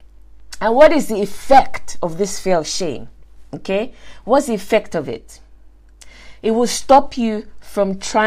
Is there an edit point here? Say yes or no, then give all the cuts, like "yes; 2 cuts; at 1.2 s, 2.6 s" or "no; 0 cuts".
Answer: no; 0 cuts